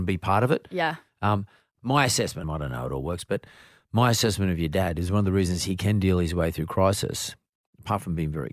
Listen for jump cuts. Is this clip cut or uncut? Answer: cut